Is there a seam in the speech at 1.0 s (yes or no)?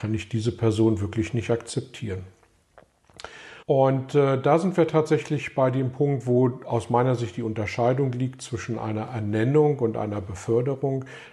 no